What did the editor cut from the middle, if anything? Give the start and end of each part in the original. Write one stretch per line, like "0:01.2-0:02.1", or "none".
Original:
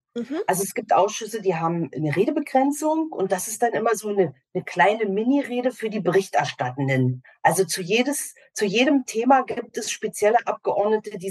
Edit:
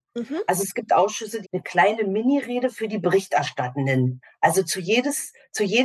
0:01.4-0:04.4